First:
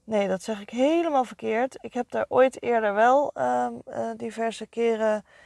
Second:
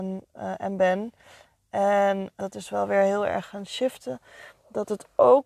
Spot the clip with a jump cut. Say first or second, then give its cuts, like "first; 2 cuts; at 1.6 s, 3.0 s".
second; 1 cut; at 2.4 s